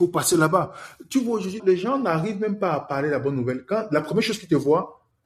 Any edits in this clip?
yes; 1 cut; at 1.6 s

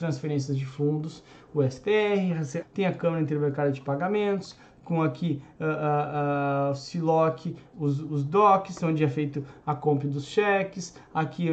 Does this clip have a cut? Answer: yes; 2 cuts; at 2.6 s, 7.7 s

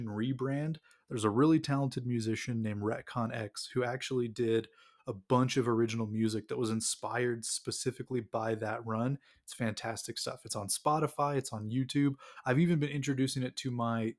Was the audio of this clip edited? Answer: no; 0 cuts

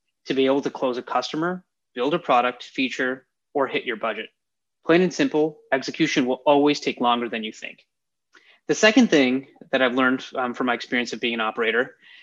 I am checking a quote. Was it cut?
no; 0 cuts

